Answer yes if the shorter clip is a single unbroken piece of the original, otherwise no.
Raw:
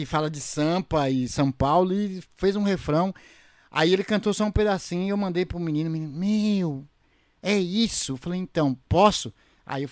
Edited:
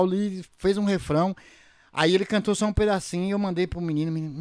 yes